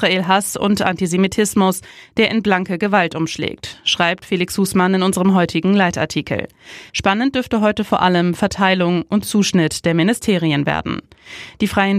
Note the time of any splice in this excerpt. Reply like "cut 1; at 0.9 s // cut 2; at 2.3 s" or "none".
cut 1; at 6.9 s

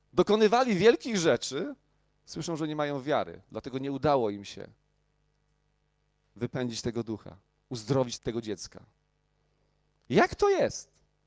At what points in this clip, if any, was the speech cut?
cut 1; at 8.2 s

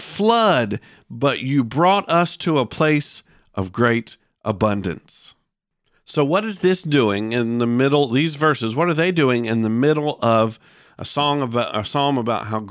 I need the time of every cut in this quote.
none

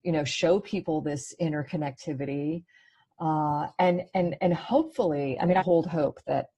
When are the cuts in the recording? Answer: cut 1; at 5.6 s

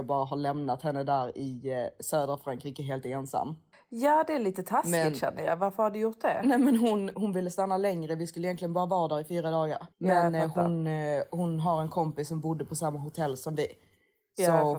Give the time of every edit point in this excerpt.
cut 1; at 7.1 s // cut 2; at 9.9 s

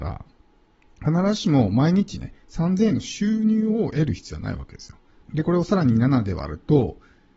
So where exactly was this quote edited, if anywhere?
cut 1; at 5.2 s

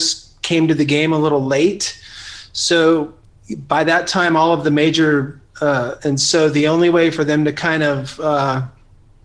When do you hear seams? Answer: cut 1; at 6.0 s

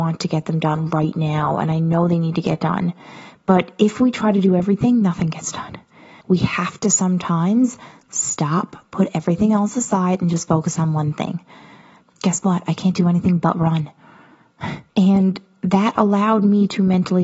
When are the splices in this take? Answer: cut 1; at 6.2 s // cut 2; at 12.0 s // cut 3; at 14.9 s

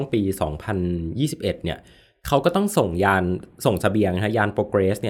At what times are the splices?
none

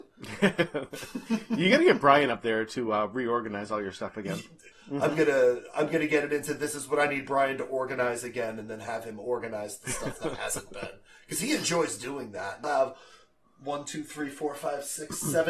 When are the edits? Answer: cut 1; at 4.7 s // cut 2; at 12.6 s

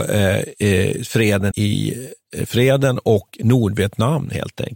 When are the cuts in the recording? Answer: cut 1; at 1.5 s

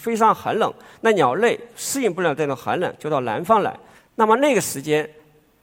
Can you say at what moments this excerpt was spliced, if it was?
cut 1; at 3.9 s

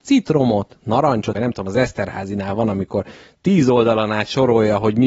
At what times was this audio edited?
cut 1; at 1.3 s

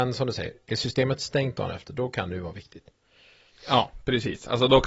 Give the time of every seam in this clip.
none

